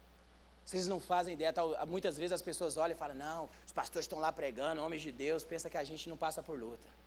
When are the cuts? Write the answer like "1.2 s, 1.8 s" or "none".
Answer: 3.5 s